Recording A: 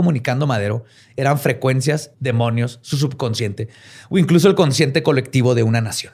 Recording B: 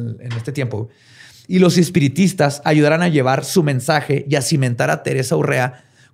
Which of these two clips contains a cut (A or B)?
A